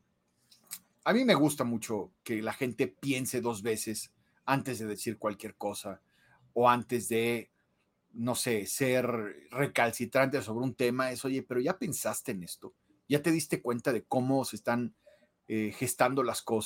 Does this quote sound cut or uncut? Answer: cut